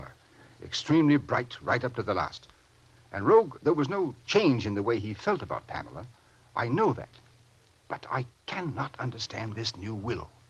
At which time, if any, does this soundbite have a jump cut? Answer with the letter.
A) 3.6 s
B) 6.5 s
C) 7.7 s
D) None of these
A